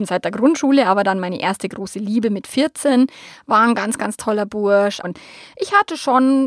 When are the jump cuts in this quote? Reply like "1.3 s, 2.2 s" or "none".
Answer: 5.0 s